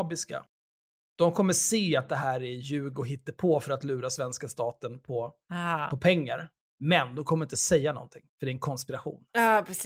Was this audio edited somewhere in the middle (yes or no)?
yes